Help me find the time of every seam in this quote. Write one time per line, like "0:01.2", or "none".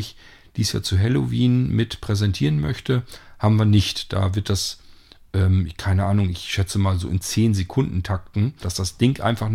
0:08.6